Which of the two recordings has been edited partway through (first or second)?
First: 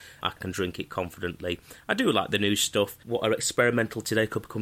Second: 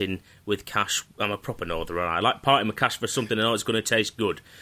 first